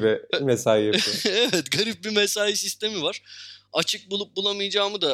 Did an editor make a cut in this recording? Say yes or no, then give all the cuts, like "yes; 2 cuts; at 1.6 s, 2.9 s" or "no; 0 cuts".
no; 0 cuts